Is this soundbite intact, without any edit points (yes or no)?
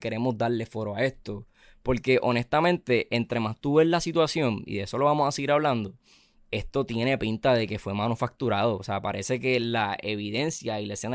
yes